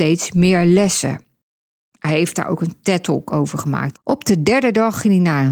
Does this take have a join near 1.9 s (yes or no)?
no